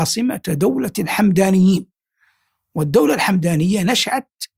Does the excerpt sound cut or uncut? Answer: uncut